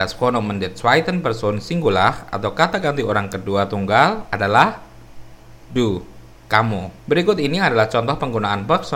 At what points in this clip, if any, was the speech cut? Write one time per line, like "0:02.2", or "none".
0:07.0